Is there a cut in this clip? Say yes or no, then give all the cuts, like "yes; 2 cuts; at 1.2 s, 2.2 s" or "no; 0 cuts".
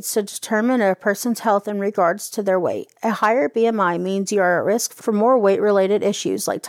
no; 0 cuts